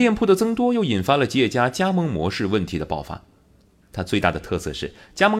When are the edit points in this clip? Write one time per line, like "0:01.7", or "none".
0:03.8